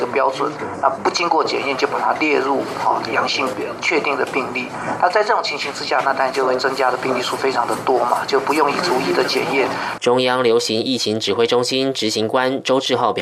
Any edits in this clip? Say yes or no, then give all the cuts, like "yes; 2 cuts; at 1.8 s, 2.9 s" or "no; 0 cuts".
yes; 1 cut; at 10.0 s